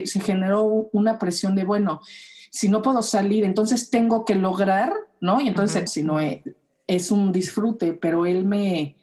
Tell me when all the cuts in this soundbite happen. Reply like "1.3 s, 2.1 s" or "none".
5.9 s